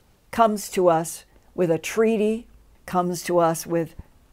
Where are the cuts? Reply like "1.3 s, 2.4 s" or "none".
2.8 s